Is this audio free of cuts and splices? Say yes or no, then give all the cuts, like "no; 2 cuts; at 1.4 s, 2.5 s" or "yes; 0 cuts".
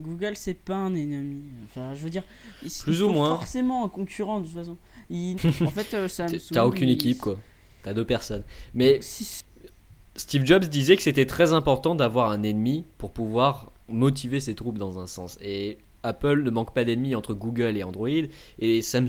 no; 1 cut; at 5.4 s